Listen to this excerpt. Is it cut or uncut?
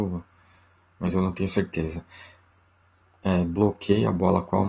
uncut